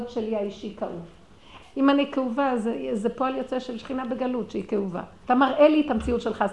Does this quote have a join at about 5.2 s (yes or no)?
yes